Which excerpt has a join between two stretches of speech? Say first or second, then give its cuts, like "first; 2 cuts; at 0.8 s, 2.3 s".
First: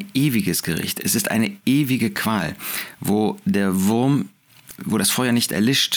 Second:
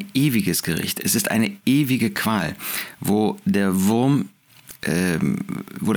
first; 1 cut; at 4.8 s